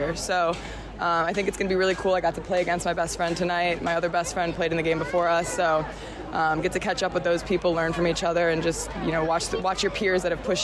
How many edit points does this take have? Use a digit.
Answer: 0